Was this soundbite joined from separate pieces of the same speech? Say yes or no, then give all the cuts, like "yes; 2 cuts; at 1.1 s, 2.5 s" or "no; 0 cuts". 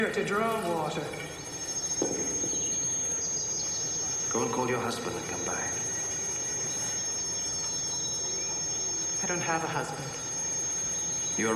no; 0 cuts